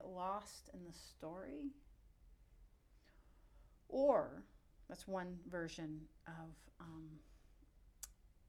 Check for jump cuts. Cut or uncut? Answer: uncut